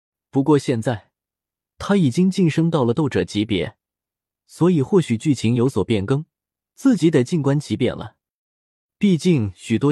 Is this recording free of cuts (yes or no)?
yes